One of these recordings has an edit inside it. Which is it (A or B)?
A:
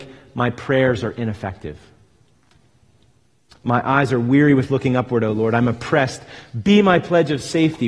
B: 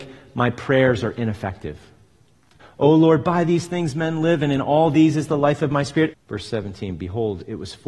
B